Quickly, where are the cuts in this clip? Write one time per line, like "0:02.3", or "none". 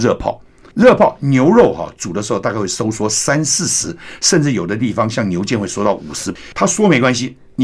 none